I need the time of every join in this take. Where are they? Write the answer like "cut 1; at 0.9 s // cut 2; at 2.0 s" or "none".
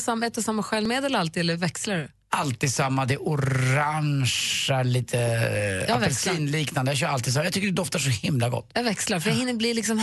none